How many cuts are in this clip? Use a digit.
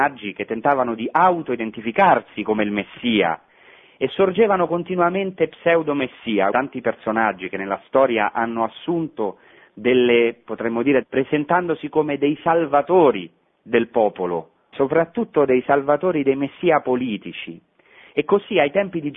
3